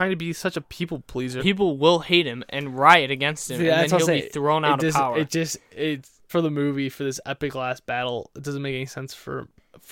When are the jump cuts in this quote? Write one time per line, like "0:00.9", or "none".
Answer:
0:01.4
0:06.3